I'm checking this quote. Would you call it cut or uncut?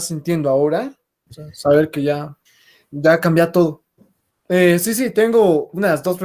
cut